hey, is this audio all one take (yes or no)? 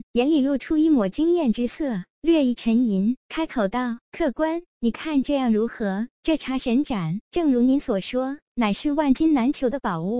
yes